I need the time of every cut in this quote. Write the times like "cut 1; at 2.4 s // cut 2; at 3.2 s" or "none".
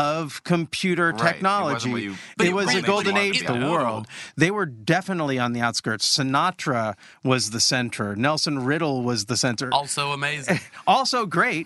cut 1; at 3.4 s